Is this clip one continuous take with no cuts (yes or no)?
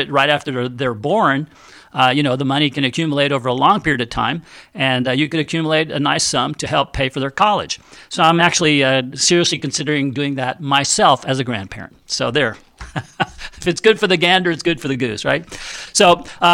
yes